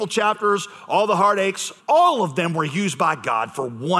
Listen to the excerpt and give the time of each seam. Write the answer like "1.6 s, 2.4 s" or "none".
1.8 s